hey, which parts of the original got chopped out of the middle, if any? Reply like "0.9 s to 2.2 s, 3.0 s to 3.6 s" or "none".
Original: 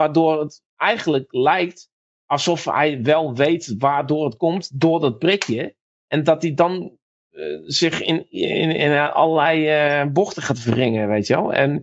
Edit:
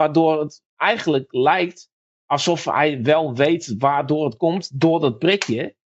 none